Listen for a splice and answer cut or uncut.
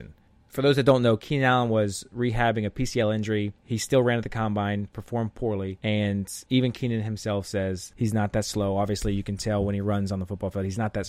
uncut